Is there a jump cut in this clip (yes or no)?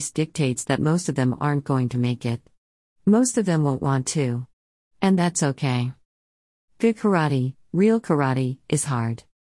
no